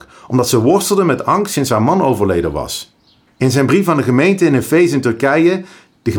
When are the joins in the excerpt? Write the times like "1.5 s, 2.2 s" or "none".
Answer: 3.3 s